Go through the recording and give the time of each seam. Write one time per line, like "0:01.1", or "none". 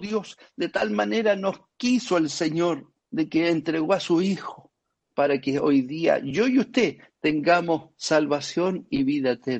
0:03.0
0:05.0